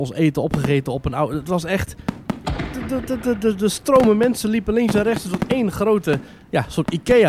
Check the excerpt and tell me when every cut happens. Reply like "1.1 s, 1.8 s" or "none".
none